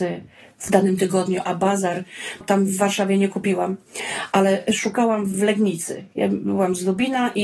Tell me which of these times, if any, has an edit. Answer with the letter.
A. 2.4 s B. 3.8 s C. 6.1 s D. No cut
A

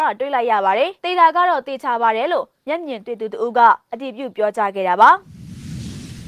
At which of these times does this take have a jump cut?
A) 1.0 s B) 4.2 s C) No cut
A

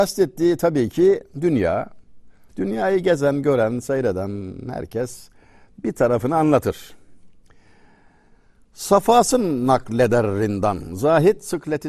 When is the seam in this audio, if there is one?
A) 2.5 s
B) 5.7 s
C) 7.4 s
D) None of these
A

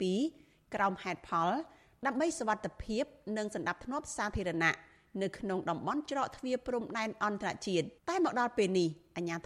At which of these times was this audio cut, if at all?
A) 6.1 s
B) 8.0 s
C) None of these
B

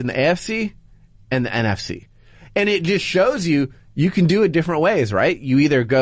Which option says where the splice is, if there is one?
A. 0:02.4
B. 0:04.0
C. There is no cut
C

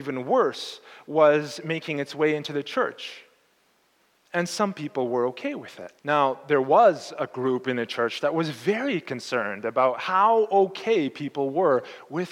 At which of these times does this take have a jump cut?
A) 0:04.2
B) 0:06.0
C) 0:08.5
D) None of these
B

